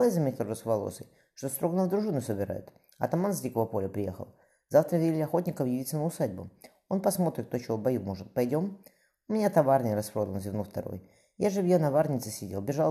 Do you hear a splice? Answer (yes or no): no